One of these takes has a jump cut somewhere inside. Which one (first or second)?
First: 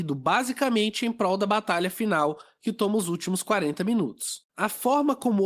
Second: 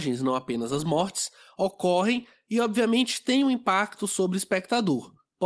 first